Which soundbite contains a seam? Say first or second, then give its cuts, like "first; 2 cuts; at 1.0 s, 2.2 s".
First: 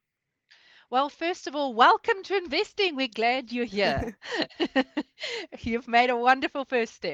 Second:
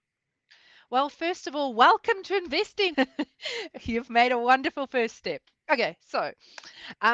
second; 1 cut; at 2.9 s